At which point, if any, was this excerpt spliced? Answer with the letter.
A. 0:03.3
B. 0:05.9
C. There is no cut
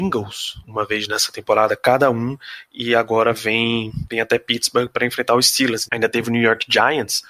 B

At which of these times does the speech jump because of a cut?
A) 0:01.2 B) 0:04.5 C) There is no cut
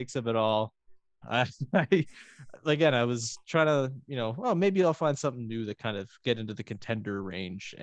A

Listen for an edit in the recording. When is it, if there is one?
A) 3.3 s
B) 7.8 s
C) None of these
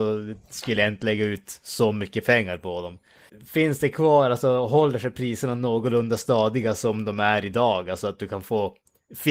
A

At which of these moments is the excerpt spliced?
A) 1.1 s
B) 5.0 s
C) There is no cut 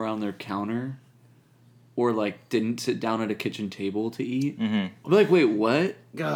B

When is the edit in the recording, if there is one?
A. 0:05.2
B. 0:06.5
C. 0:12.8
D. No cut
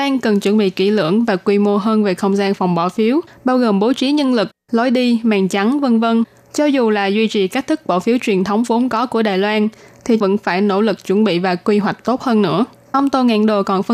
D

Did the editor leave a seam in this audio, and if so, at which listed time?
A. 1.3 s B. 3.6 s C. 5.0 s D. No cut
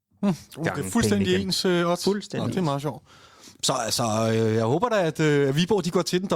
B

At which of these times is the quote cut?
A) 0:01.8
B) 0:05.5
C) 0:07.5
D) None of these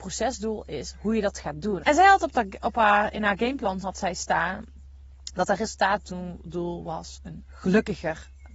A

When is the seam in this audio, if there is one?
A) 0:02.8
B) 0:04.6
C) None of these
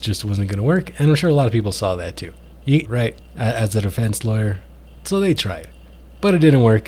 A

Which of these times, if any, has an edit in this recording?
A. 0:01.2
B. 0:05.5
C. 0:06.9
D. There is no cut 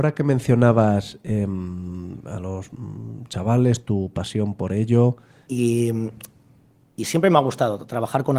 B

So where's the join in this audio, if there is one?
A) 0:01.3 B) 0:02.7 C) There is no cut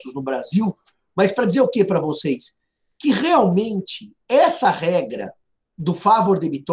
C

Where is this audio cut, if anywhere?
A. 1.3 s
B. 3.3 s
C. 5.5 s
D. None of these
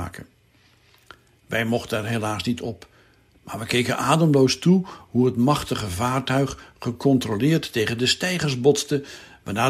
B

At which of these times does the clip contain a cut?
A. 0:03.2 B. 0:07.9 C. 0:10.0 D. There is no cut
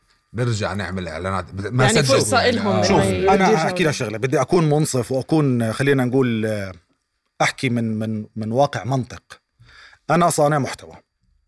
D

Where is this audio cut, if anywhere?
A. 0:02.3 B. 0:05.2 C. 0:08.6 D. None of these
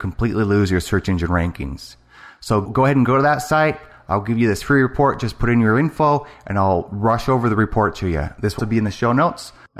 C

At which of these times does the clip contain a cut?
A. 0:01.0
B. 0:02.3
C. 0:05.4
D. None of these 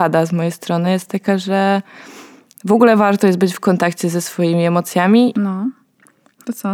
C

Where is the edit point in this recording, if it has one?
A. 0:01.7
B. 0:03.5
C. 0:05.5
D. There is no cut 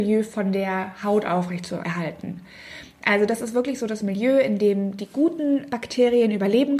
D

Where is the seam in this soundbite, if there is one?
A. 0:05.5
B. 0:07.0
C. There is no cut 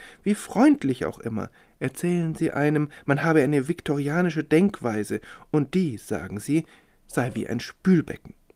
C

